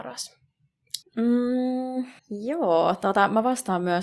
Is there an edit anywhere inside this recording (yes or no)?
yes